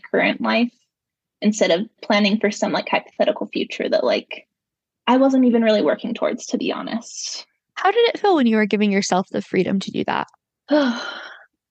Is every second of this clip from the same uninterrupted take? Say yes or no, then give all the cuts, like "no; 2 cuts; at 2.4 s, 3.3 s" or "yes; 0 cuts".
yes; 0 cuts